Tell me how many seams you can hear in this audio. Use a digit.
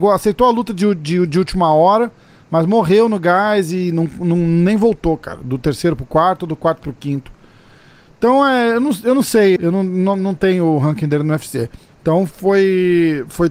2